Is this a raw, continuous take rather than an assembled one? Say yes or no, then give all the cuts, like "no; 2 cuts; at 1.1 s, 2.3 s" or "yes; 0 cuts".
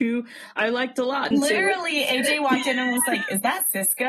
no; 1 cut; at 1.3 s